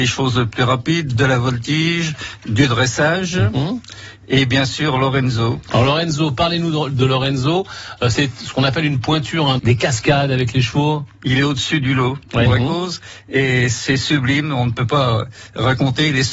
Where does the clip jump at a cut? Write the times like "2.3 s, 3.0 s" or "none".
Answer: 9.6 s, 12.5 s